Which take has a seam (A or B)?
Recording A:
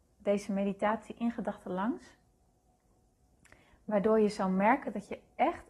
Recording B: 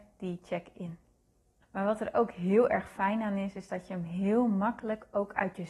B